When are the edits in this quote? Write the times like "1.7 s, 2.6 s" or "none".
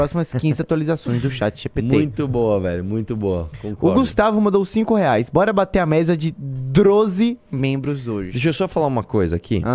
none

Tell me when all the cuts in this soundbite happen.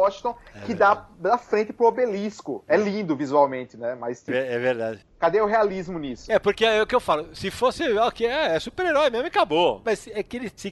none

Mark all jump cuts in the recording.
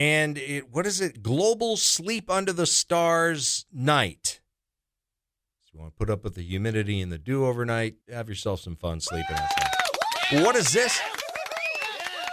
8.0 s

